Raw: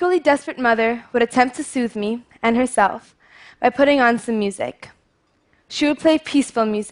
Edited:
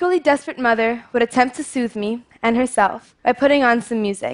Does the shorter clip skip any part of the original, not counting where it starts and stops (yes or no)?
yes